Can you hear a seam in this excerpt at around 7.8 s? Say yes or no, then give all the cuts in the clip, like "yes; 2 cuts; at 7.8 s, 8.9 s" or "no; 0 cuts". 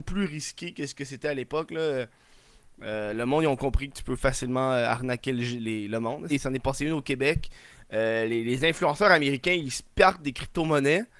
no; 1 cut; at 6.3 s